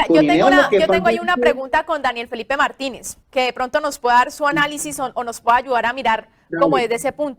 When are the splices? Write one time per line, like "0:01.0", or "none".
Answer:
0:03.2